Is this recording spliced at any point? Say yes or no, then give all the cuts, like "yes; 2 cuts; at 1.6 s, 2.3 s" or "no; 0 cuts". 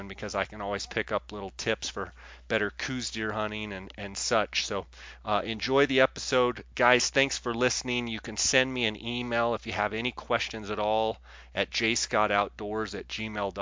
no; 0 cuts